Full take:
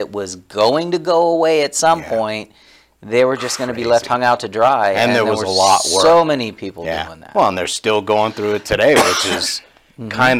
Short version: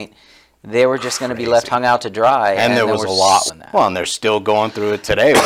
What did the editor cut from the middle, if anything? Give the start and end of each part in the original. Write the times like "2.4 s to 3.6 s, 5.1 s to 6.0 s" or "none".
5.9 s to 7.1 s